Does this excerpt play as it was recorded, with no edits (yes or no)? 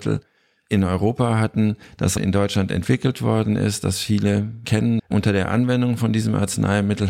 no